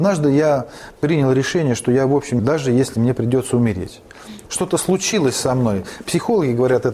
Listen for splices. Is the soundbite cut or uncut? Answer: cut